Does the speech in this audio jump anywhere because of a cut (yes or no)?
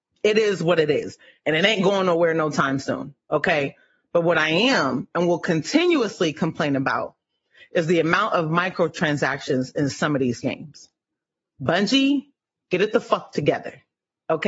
no